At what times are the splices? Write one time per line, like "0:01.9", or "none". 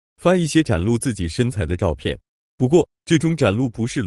none